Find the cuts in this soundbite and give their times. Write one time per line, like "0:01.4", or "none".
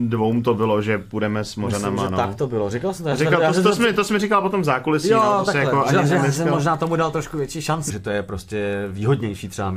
0:07.9